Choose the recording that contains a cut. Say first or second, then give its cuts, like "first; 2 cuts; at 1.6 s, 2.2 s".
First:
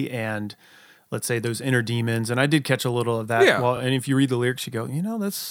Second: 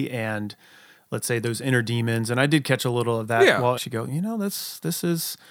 second; 1 cut; at 3.8 s